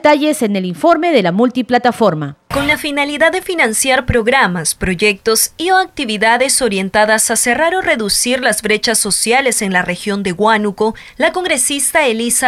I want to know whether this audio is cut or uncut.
cut